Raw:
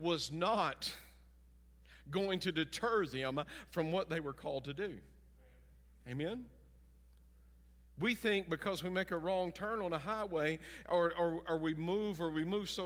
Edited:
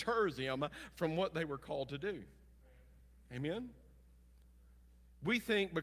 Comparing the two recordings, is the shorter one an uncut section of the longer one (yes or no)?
yes